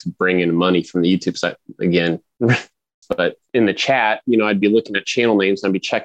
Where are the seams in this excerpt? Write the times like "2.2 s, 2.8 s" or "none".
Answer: 3.0 s